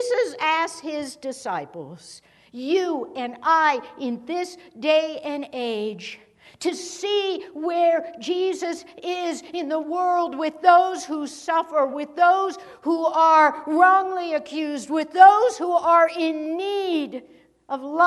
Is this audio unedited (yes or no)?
yes